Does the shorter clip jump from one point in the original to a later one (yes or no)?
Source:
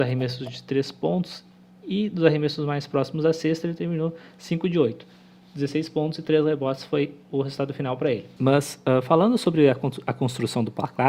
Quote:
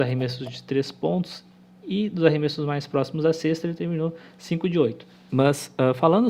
yes